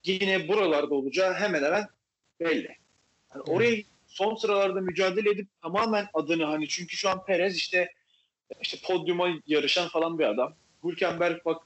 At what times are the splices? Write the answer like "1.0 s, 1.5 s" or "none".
8.5 s